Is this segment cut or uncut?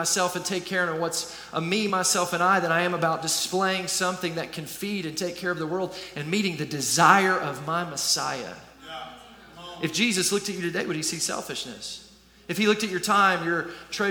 uncut